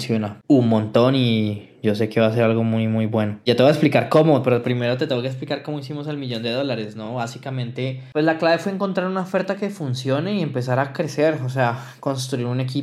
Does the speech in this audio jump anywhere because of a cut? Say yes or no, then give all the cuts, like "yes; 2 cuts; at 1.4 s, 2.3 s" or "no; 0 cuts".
no; 0 cuts